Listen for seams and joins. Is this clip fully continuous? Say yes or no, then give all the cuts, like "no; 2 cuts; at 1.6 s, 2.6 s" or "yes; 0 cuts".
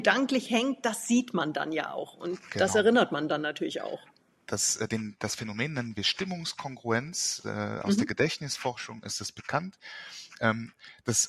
yes; 0 cuts